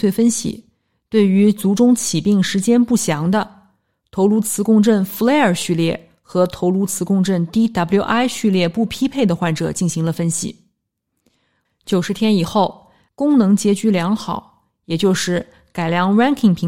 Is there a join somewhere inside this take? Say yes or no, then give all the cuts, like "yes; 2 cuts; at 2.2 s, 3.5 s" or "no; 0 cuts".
yes; 2 cuts; at 11.7 s, 13.1 s